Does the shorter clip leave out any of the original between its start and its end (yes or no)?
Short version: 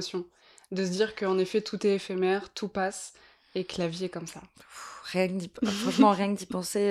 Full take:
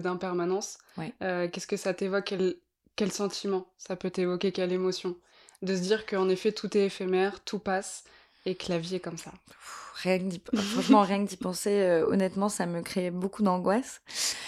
no